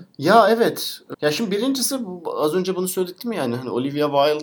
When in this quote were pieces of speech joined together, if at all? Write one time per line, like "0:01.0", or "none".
0:01.1